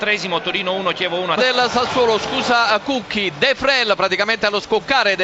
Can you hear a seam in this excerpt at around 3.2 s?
no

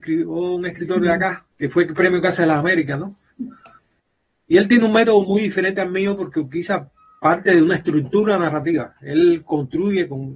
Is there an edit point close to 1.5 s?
yes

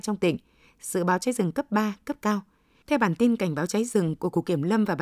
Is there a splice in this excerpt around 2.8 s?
yes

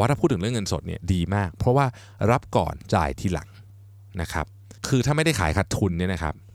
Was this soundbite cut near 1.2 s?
no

